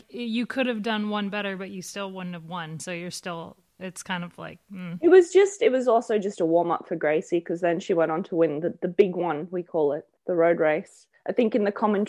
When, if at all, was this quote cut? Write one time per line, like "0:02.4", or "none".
0:10.2